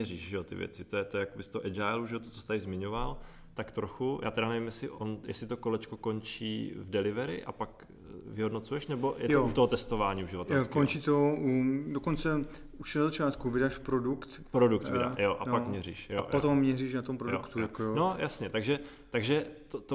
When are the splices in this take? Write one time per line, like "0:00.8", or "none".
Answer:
none